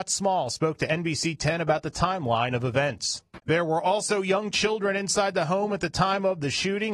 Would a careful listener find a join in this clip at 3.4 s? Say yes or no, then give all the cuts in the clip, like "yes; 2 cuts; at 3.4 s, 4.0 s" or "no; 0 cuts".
yes; 1 cut; at 3.4 s